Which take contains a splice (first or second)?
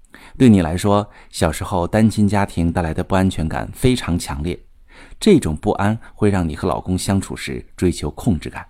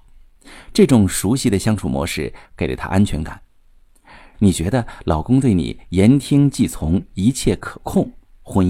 second